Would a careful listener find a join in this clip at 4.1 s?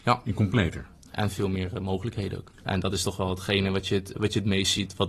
yes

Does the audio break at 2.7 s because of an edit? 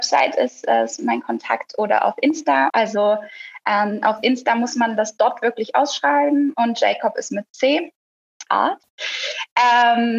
yes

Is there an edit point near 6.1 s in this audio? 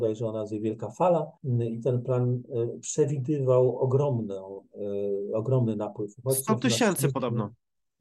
no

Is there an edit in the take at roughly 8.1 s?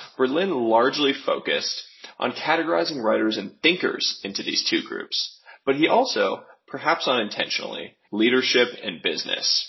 yes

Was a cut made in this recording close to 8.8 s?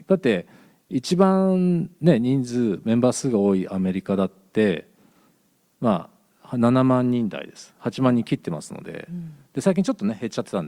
no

